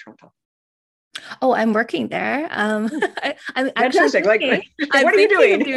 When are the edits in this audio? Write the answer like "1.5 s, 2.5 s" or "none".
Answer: none